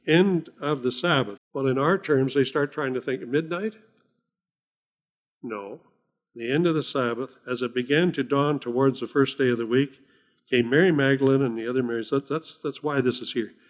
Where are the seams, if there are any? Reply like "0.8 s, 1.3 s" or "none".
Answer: 1.4 s, 6.3 s